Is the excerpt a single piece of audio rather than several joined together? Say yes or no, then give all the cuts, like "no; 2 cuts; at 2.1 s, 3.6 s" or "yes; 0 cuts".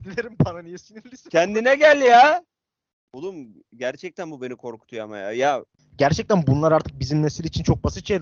no; 2 cuts; at 2.9 s, 5.8 s